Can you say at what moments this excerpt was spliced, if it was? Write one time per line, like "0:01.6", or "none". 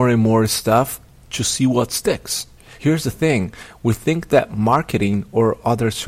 0:02.8

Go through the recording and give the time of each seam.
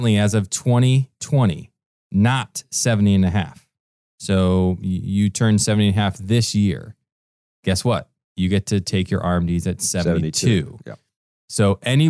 none

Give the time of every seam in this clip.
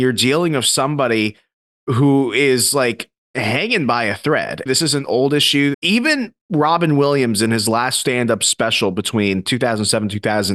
0:04.7
0:05.7

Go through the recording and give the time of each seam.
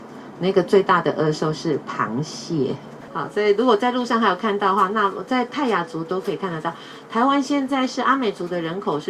0:03.1

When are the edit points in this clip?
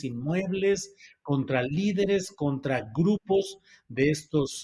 none

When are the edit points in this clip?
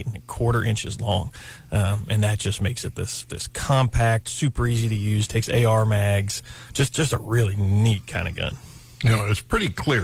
none

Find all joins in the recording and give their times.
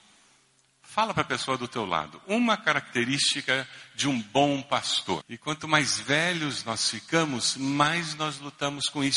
0:05.2

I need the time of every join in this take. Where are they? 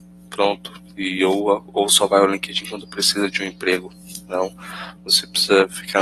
0:05.0

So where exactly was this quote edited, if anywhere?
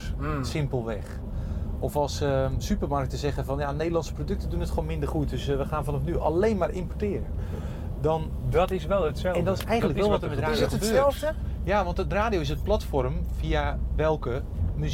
none

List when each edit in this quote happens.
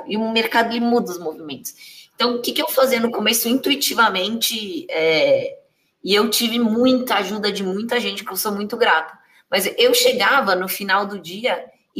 none

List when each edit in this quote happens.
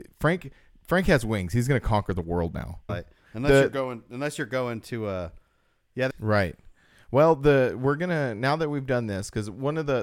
0:02.9
0:06.1

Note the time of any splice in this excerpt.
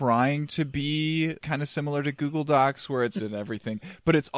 0:01.4
0:03.2

